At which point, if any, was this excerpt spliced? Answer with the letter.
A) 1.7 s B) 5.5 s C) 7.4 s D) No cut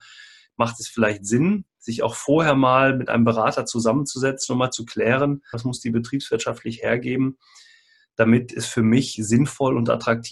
B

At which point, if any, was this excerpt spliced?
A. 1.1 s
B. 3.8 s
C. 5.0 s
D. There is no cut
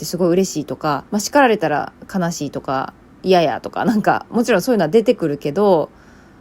A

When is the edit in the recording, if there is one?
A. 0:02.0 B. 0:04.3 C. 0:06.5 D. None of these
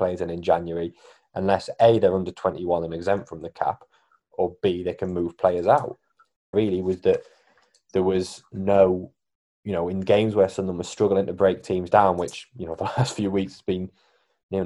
C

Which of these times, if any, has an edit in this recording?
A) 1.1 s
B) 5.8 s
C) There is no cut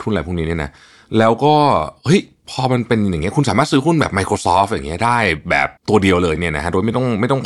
B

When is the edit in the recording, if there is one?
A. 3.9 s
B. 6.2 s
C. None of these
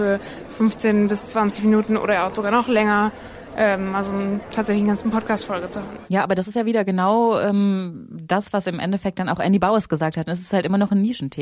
C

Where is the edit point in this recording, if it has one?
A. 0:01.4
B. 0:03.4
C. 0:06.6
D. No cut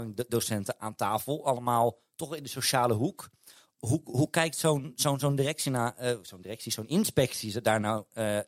D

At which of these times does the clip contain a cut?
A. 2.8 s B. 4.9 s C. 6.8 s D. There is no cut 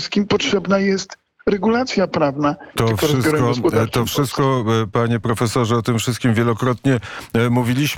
A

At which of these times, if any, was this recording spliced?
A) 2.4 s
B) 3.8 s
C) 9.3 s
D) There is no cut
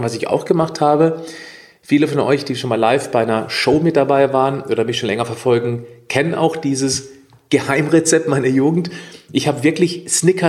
D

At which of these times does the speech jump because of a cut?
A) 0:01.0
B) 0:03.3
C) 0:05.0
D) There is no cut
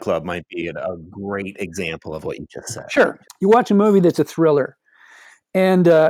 B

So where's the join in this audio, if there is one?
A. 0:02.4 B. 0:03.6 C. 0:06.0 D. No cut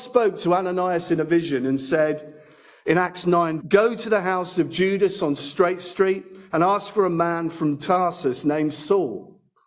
B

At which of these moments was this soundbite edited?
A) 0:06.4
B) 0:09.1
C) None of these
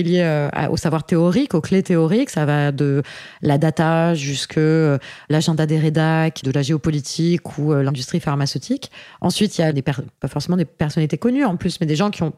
A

